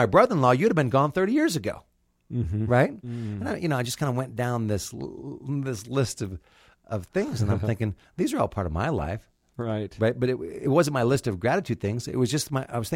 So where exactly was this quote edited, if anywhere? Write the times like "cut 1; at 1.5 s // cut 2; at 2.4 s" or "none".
cut 1; at 3.0 s